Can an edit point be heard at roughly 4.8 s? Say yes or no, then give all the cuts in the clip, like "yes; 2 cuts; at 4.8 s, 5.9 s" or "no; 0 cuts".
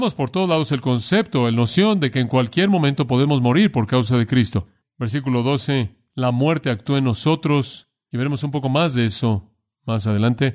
yes; 1 cut; at 4.8 s